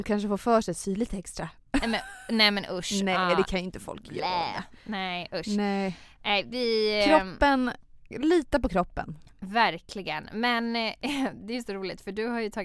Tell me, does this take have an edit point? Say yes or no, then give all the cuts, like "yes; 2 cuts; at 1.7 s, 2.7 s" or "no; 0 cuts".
no; 0 cuts